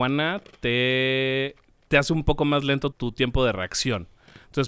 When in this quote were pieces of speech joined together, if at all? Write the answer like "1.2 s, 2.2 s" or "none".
1.9 s, 2.9 s